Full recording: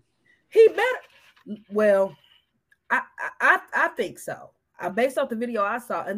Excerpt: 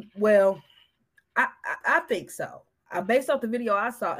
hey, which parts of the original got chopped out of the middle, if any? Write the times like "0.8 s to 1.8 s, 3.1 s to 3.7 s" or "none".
3.3 s to 3.7 s